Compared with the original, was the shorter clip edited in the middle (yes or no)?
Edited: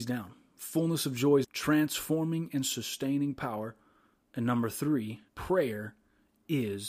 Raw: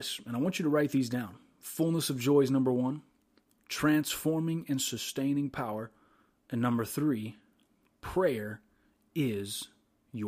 yes